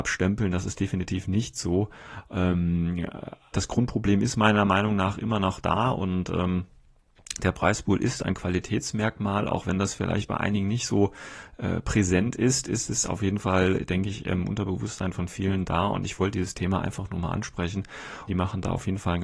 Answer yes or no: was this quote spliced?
yes